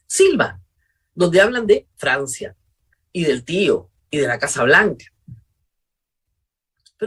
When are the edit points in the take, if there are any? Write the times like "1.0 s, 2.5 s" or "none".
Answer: none